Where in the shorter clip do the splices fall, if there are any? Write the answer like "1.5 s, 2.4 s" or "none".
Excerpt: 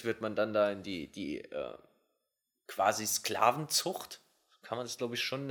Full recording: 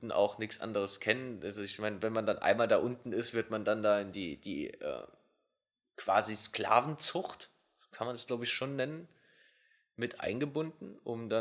none